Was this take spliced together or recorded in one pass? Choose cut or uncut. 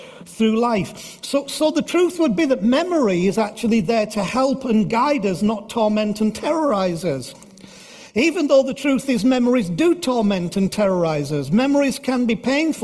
uncut